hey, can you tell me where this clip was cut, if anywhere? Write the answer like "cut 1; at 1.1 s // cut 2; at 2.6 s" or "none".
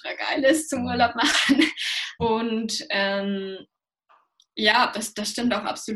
cut 1; at 2.2 s

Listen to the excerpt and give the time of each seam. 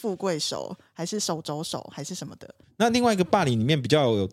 cut 1; at 2.6 s

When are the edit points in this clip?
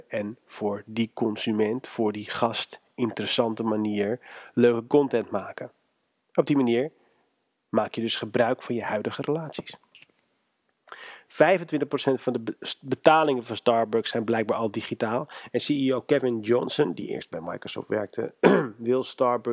none

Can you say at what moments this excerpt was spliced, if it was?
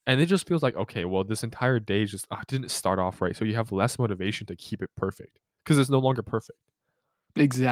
none

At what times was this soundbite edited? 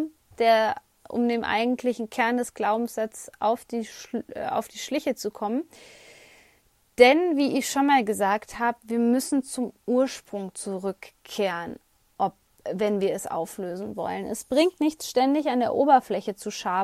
none

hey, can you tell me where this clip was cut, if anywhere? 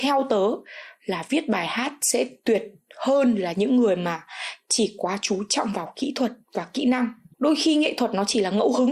cut 1; at 6.4 s

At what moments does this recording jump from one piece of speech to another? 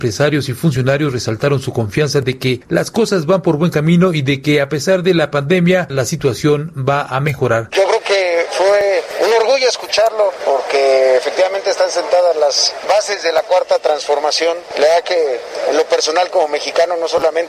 cut 1; at 7.7 s

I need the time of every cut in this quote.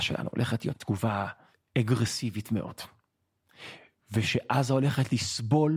none

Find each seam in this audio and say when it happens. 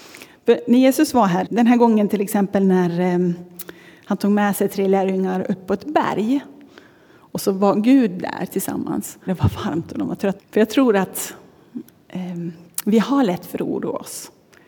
cut 1; at 1.5 s // cut 2; at 9.3 s // cut 3; at 10.4 s

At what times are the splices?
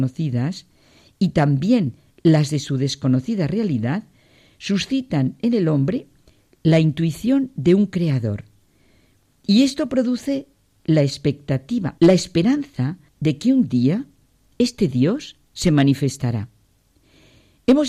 cut 1; at 12.0 s // cut 2; at 13.1 s

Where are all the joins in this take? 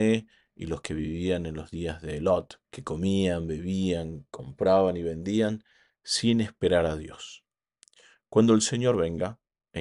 cut 1; at 2.6 s

